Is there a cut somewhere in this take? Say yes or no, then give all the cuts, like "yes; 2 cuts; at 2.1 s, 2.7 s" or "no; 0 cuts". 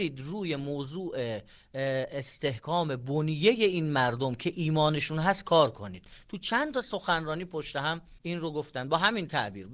yes; 1 cut; at 8.2 s